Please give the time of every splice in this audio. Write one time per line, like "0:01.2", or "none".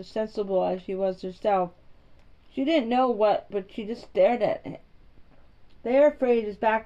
0:03.5
0:05.8